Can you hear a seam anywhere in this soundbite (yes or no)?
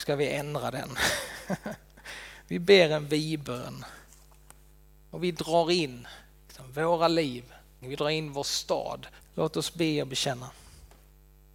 yes